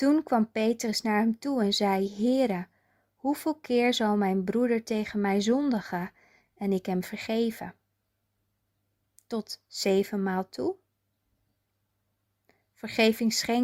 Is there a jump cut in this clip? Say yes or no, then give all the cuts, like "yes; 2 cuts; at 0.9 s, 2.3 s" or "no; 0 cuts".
no; 0 cuts